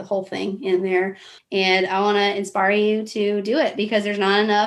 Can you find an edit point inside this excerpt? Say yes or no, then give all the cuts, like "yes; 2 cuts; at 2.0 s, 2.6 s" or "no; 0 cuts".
yes; 1 cut; at 1.4 s